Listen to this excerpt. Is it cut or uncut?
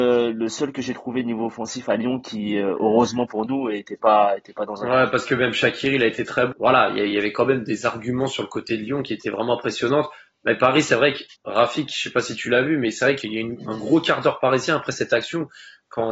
cut